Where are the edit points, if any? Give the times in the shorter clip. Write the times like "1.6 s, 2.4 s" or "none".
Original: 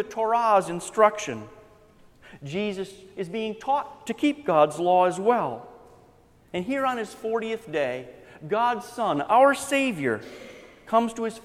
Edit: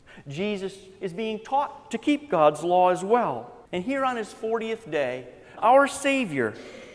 3.6 s, 5.6 s

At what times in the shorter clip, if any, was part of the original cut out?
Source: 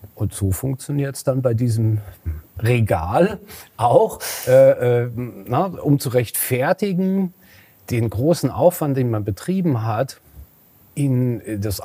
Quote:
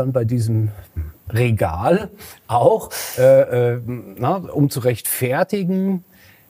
none

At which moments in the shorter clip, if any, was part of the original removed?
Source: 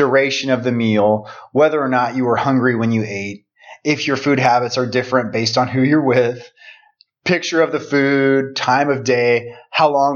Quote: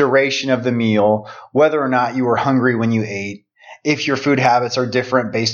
none

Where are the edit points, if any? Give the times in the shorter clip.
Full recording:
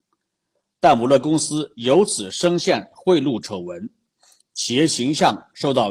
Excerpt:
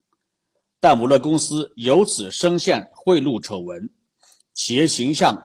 none

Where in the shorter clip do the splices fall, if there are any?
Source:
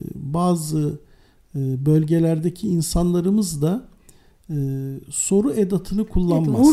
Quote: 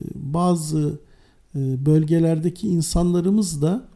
none

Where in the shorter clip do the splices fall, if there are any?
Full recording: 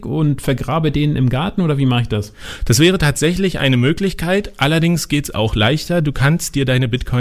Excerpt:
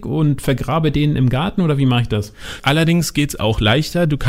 2.6 s

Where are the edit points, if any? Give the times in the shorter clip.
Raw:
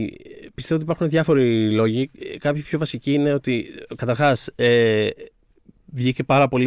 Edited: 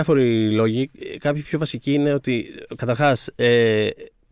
none

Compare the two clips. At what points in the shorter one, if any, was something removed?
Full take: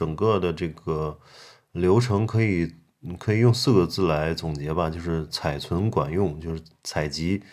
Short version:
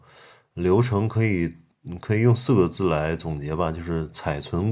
none

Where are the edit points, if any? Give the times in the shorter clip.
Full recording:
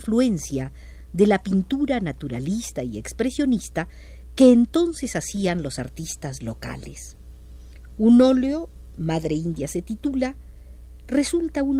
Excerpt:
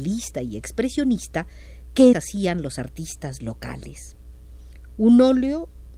2.1 s

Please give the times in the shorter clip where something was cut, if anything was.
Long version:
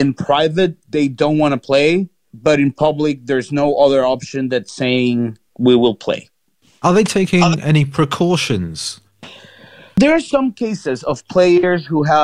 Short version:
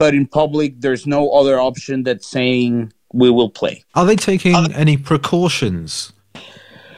3.9 s

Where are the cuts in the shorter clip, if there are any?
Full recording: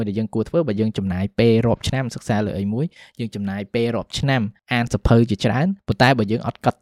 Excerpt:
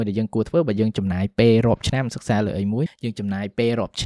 2.9 s

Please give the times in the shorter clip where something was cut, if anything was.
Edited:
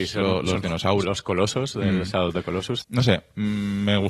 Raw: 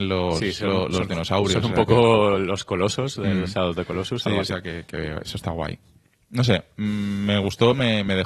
1.0 s, 2.8 s

